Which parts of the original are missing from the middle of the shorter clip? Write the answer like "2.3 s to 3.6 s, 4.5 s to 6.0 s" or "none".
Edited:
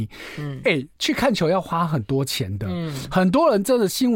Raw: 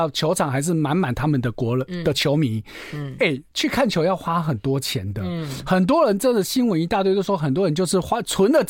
none